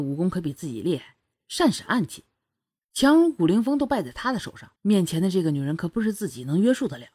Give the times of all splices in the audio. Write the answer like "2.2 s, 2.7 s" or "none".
4.8 s